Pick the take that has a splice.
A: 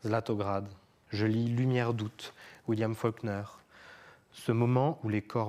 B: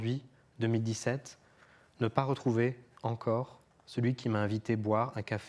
A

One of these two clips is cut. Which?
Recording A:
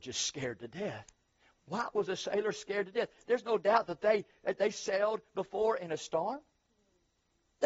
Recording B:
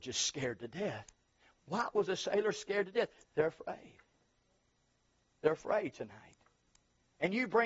B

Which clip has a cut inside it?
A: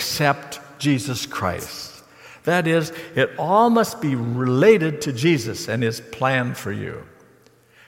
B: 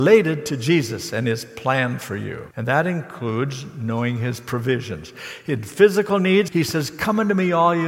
B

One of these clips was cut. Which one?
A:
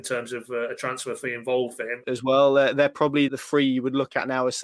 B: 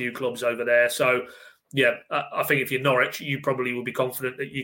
A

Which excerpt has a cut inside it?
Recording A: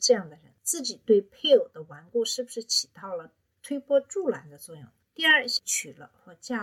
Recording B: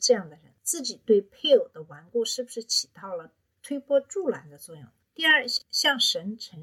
A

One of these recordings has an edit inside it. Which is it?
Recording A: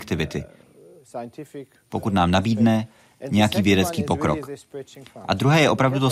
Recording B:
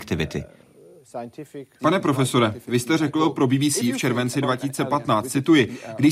B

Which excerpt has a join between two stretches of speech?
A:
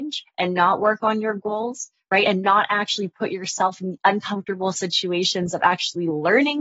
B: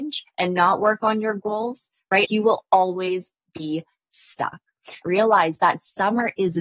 B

